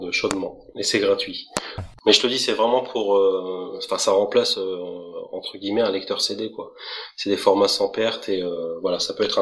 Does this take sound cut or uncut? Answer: cut